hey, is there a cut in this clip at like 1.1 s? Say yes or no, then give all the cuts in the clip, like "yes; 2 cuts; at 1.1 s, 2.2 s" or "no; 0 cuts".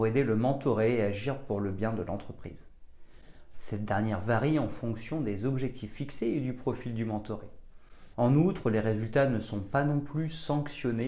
no; 2 cuts; at 3.5 s, 8.1 s